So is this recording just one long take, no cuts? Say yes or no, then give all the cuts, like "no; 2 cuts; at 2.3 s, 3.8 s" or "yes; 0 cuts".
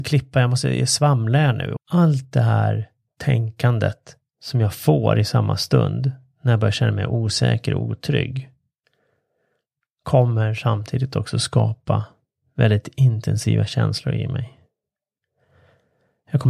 no; 1 cut; at 1.8 s